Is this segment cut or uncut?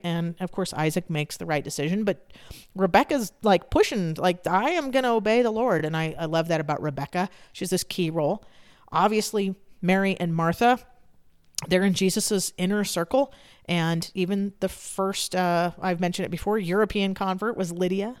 uncut